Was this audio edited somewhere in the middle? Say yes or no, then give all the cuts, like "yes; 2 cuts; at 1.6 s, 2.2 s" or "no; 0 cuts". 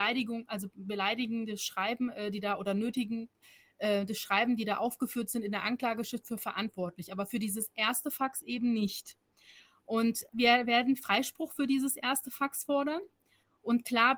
yes; 1 cut; at 10.3 s